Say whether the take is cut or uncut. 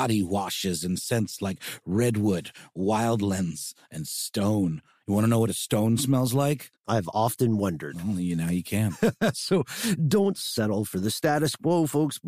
uncut